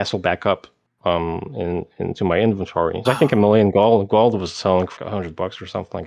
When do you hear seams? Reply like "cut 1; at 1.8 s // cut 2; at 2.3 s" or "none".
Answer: cut 1; at 3.0 s // cut 2; at 5.0 s